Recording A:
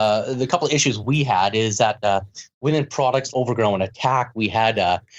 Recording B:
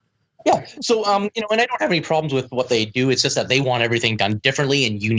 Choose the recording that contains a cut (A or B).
A